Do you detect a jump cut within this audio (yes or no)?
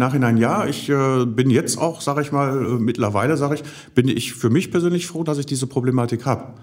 no